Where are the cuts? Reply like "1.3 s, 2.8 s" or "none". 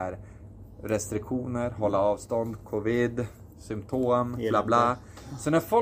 none